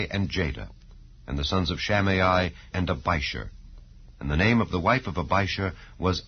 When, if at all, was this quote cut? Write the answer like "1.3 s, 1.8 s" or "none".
2.7 s